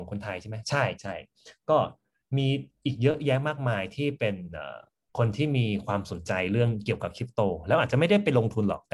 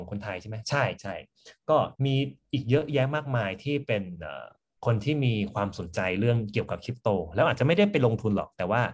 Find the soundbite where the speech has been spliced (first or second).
second